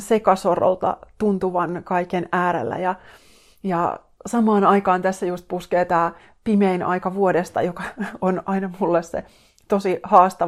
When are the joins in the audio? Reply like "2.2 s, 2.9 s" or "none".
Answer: none